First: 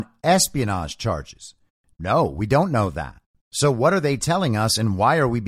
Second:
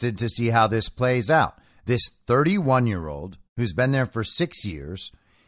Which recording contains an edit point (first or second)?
first